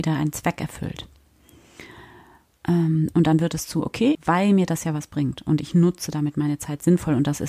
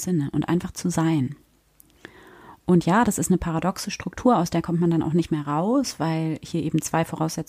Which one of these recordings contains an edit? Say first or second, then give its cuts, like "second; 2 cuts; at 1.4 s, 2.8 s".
first; 1 cut; at 4.1 s